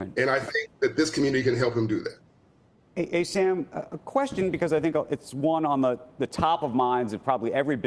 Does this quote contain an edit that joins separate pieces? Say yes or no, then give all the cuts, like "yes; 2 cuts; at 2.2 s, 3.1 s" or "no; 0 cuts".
no; 0 cuts